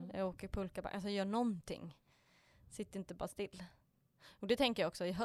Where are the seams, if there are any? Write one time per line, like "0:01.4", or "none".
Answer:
none

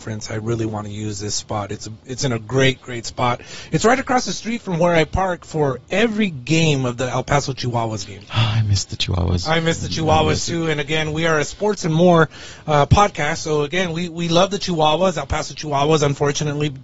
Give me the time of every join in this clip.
none

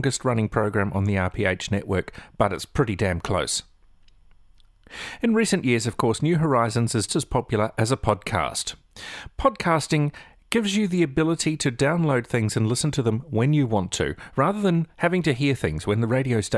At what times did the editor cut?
0:07.1

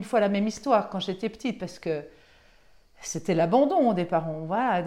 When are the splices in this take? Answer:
none

